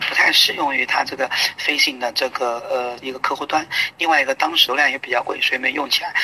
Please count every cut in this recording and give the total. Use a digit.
1